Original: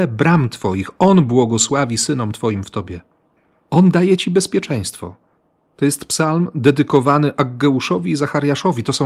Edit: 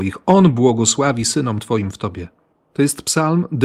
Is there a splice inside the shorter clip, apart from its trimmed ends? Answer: yes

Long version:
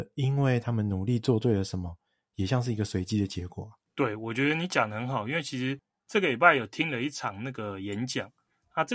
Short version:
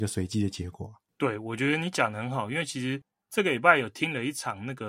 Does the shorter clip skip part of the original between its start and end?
no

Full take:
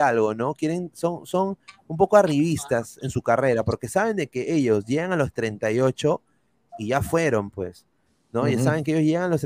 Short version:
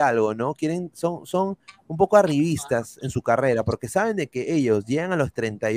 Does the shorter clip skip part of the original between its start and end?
no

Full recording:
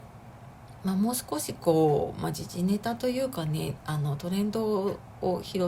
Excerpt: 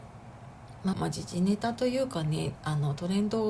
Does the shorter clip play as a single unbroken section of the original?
no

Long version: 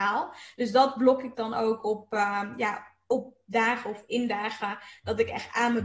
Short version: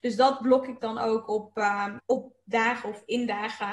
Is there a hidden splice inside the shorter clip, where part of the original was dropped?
yes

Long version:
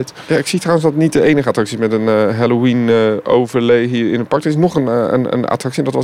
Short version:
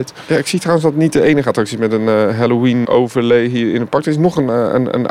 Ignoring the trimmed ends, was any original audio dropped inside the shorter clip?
yes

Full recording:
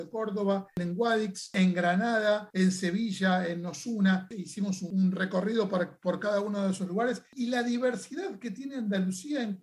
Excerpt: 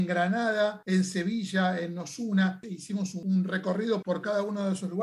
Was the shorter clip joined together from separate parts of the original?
yes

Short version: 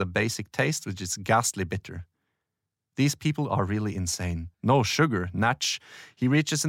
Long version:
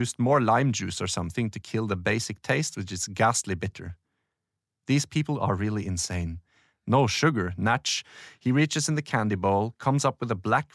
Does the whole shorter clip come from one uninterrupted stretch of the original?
no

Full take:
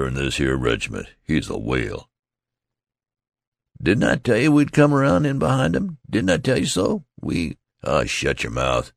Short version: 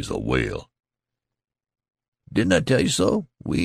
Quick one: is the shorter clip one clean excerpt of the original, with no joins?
no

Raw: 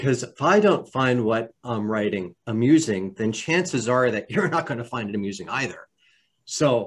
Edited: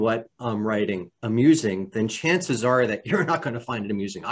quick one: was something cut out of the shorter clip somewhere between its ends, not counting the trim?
no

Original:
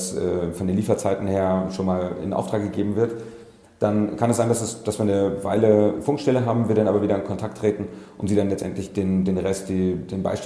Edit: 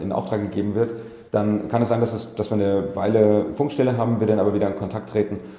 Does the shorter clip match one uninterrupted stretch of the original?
no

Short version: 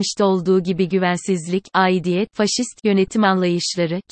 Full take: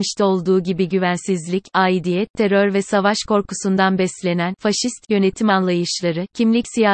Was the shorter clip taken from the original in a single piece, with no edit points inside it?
no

